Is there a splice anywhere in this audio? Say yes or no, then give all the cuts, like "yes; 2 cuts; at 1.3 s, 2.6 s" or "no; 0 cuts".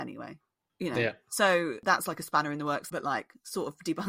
yes; 1 cut; at 2.9 s